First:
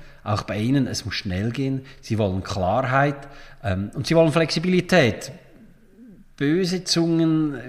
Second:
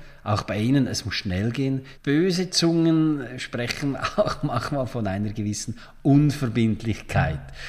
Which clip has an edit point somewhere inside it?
second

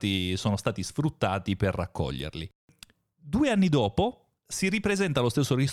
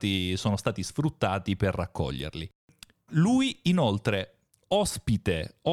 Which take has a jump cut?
second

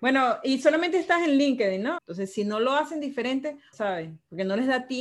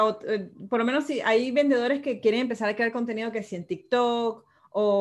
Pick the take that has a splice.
first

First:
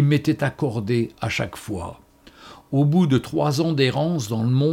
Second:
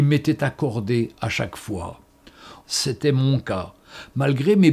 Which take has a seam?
second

